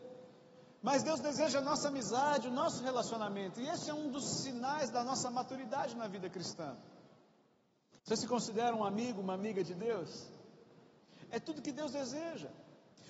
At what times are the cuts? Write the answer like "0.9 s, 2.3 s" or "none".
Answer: 8.0 s

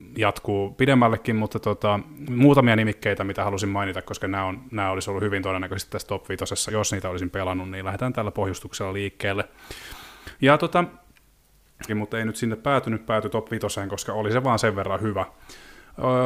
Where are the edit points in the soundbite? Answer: 6.7 s, 11.9 s

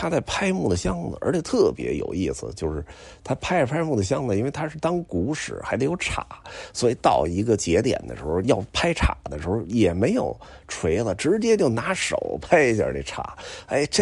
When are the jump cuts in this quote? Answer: 8.4 s

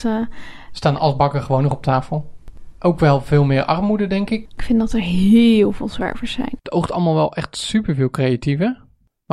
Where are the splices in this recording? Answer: 6.6 s

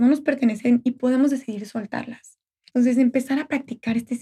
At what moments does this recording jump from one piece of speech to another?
2.7 s

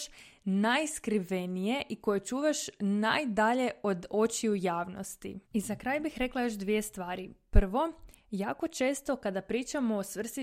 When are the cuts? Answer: 5.4 s

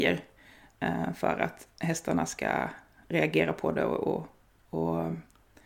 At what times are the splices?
none

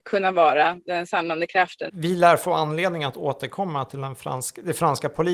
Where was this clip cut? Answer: 1.9 s

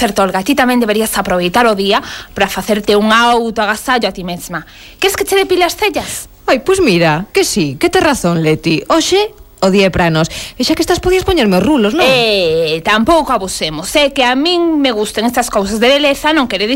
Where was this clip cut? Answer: none

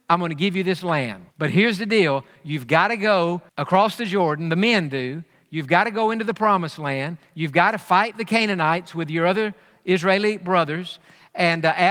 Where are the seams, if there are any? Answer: 1.3 s, 3.5 s

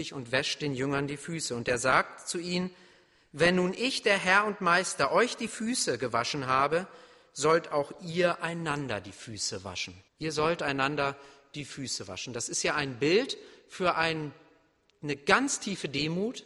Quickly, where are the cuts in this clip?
10.1 s

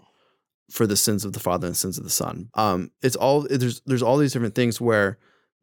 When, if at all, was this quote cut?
2.5 s

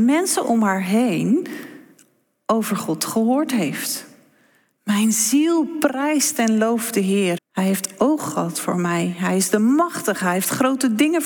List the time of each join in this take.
7.4 s

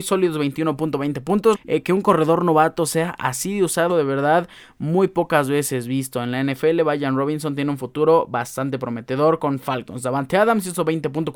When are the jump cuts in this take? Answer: 1.5 s, 3.9 s

